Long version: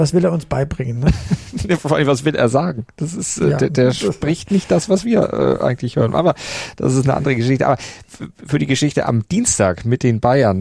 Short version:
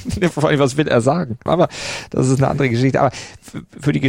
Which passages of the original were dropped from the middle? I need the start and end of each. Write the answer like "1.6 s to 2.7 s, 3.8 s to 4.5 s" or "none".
2.9 s to 6.1 s